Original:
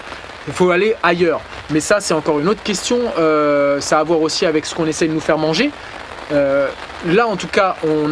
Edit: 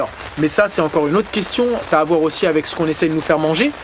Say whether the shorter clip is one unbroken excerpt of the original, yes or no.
no